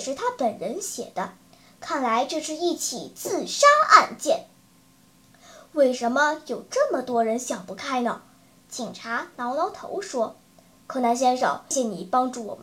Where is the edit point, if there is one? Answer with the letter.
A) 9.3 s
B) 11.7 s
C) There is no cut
B